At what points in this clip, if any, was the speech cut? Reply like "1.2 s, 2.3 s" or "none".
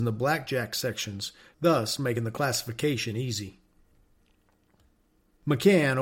1.5 s